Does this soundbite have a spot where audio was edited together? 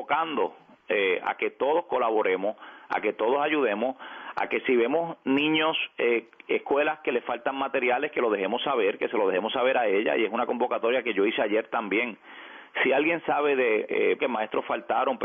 yes; 2 cuts; at 12.8 s, 14.2 s

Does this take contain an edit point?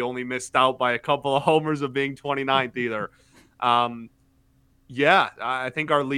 no; 0 cuts

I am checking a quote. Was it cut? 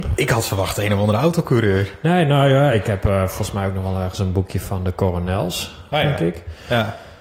no; 0 cuts

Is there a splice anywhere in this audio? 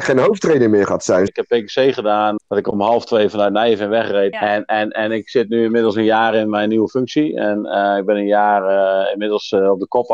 yes; 3 cuts; at 1.3 s, 2.4 s, 4.3 s

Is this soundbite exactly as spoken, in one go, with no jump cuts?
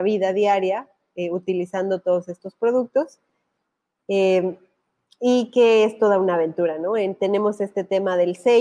no; 1 cut; at 4.0 s

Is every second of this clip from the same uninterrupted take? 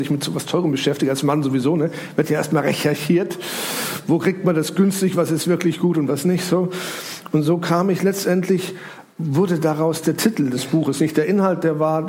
yes; 0 cuts

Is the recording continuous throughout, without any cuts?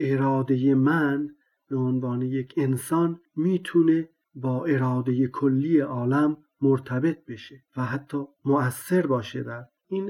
no; 1 cut; at 7.7 s

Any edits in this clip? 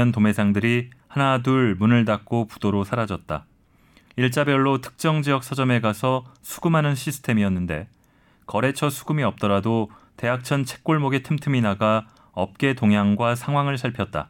yes; 1 cut; at 4.1 s

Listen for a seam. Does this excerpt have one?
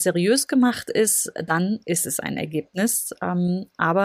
no; 0 cuts

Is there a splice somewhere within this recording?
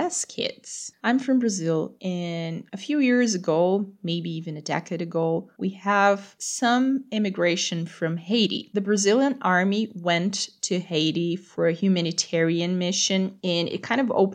yes; 1 cut; at 0.9 s

